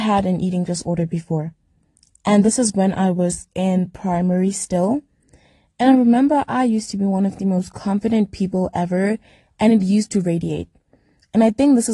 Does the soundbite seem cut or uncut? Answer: uncut